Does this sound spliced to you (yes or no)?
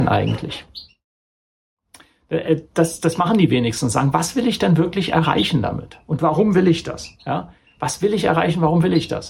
yes